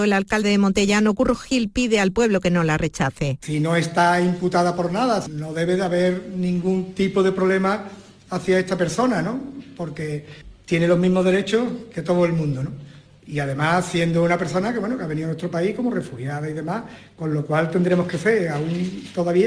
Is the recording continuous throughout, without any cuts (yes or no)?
yes